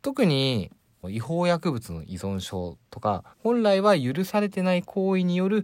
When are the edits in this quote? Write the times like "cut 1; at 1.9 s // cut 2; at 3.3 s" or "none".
cut 1; at 1.0 s // cut 2; at 3.3 s